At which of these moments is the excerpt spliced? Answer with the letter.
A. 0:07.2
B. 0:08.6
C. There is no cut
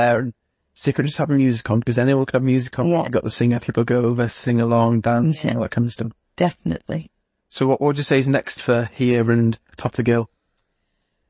B